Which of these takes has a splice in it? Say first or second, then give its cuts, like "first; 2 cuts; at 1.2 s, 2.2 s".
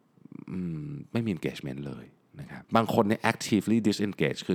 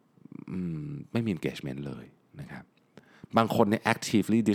first; 1 cut; at 2.6 s